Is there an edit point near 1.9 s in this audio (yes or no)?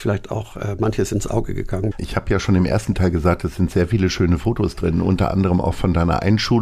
yes